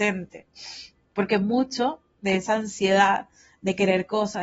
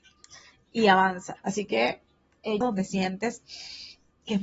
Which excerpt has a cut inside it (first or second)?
second